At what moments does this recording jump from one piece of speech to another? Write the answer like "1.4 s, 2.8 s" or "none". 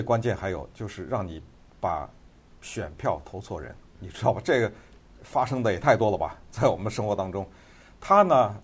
3.9 s